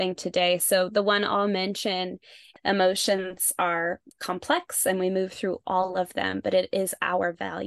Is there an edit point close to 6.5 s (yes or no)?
no